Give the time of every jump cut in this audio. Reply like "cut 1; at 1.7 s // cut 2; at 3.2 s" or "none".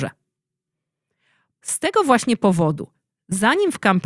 cut 1; at 1.5 s